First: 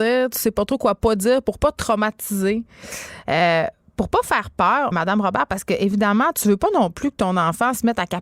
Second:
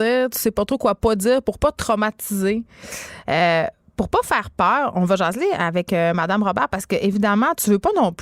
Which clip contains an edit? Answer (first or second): first